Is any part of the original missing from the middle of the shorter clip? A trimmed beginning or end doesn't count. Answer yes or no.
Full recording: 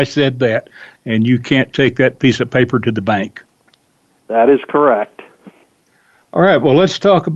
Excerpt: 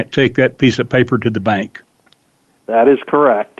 no